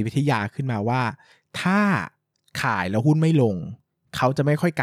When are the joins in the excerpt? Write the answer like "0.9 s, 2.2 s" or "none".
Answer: none